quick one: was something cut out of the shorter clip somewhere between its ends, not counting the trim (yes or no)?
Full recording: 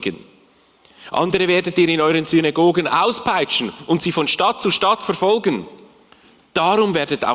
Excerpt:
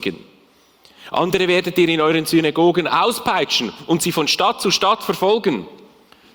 no